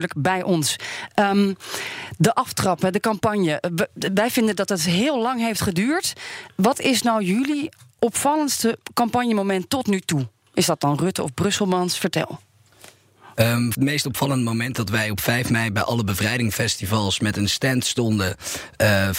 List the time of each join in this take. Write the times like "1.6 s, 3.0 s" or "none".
13.7 s